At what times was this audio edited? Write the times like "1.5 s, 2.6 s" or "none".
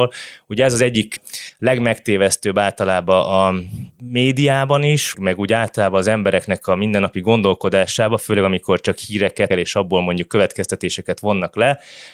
5.1 s, 9.5 s